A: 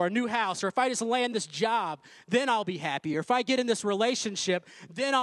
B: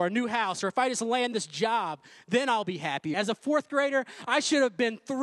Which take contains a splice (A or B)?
B